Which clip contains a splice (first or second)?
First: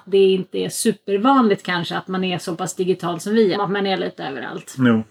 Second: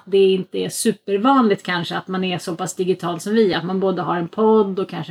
first